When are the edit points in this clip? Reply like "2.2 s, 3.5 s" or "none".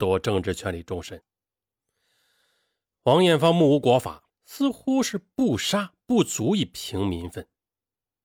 4.3 s